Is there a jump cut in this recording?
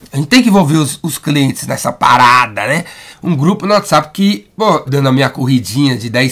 yes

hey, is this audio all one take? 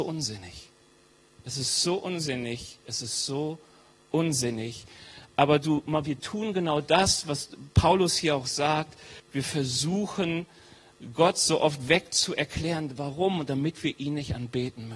yes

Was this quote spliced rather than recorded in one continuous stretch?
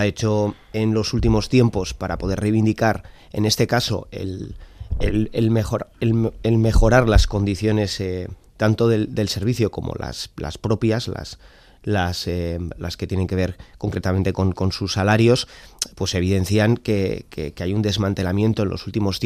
no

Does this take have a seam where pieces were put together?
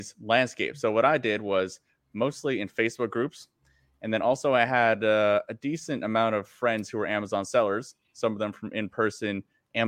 no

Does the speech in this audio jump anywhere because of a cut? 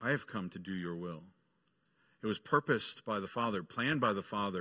no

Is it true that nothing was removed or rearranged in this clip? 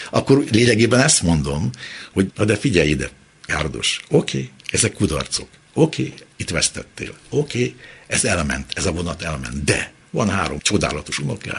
yes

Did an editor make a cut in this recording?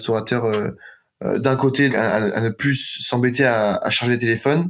yes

